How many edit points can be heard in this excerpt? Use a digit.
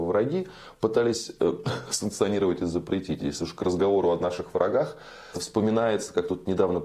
1